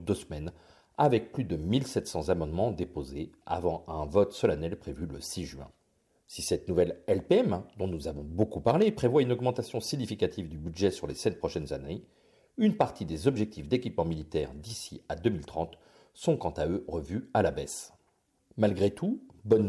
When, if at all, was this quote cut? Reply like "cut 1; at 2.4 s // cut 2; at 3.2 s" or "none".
none